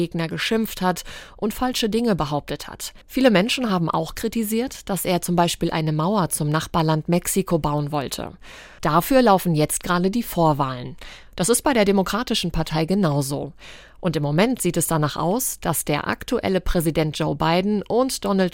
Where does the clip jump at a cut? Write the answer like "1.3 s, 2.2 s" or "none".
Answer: 3.0 s, 8.8 s